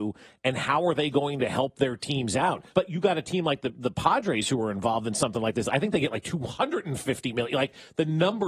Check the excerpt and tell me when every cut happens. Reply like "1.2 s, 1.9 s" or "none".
2.7 s